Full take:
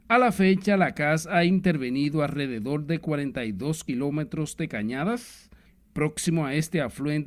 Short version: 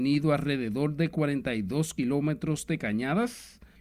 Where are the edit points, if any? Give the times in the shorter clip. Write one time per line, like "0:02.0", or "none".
none